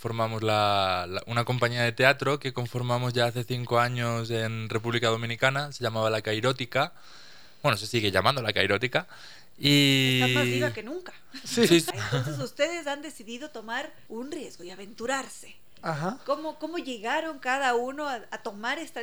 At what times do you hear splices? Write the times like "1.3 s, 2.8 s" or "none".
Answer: 11.9 s, 14.1 s